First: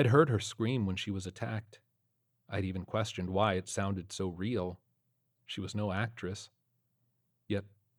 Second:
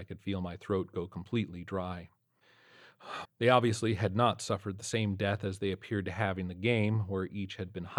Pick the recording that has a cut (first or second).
second